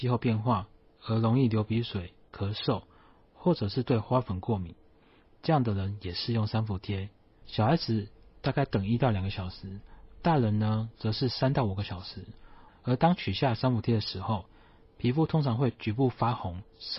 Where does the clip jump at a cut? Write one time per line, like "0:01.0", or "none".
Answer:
0:07.4
0:12.7